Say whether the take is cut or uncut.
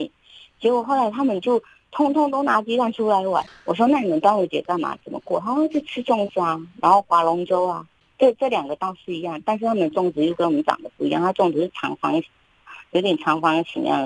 uncut